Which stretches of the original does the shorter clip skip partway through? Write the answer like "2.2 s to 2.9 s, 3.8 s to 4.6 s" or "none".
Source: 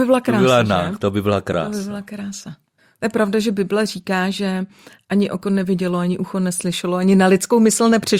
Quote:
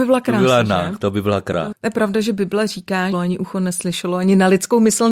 1.7 s to 2.9 s, 4.3 s to 5.9 s